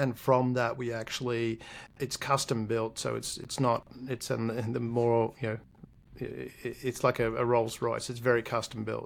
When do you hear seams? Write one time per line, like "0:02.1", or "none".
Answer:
none

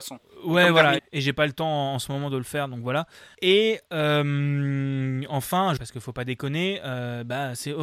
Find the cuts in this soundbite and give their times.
0:01.0
0:03.3
0:05.8

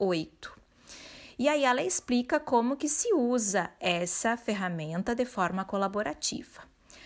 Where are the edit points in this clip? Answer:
none

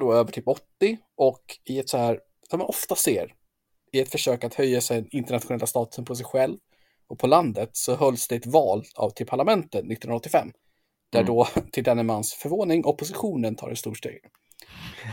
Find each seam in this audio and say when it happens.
none

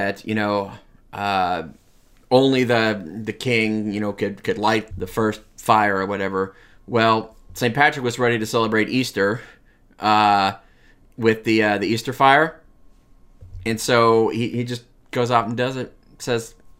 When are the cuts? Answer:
0:04.9

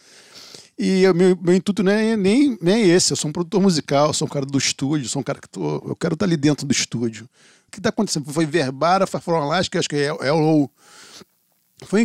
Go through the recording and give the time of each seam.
0:07.7

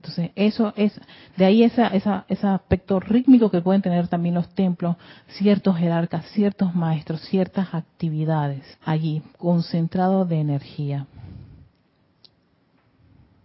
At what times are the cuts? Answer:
0:01.9
0:08.7

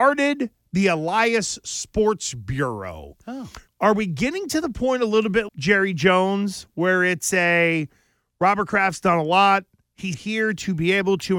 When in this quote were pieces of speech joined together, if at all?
0:03.7
0:05.5
0:10.1

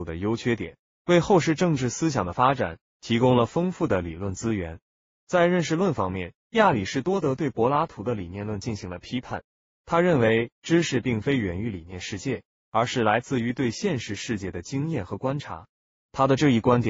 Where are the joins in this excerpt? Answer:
none

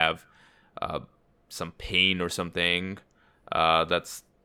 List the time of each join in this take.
none

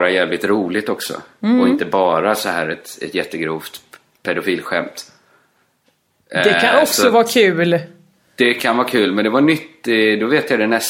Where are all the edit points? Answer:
none

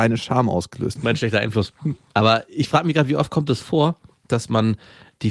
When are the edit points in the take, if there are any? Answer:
0:01.0

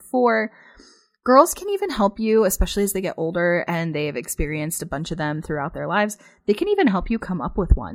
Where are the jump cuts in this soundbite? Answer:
none

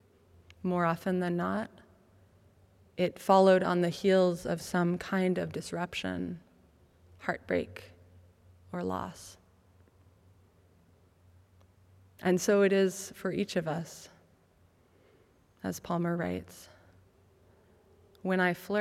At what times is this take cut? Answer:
none

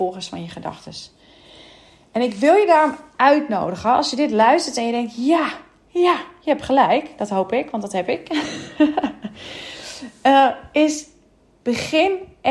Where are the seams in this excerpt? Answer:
none

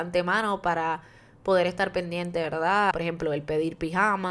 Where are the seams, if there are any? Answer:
0:02.9

